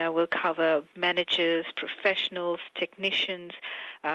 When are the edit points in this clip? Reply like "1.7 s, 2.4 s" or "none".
none